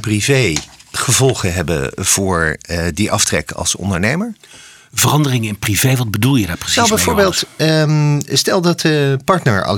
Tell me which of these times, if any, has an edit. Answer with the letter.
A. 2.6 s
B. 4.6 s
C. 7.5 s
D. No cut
D